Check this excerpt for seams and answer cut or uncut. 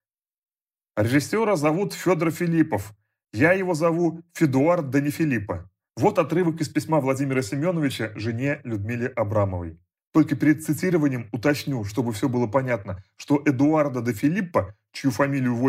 cut